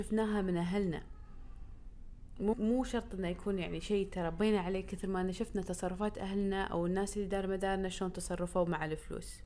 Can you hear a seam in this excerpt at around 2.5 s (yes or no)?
yes